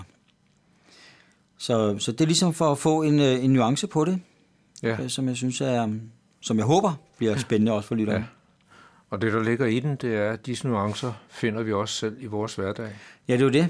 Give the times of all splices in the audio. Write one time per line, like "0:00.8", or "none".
none